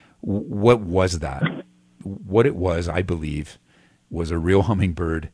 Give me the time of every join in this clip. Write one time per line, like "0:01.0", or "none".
none